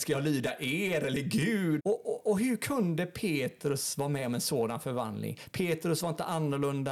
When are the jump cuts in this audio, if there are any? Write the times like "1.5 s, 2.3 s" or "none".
1.8 s